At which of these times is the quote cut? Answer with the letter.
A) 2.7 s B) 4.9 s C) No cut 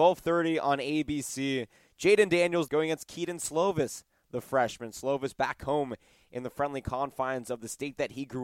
A